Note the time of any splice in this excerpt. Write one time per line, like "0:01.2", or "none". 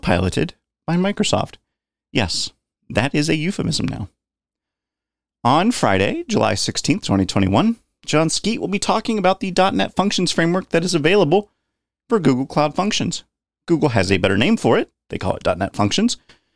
none